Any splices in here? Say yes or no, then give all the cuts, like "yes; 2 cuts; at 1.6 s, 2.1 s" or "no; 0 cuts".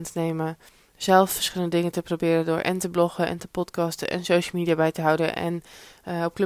no; 0 cuts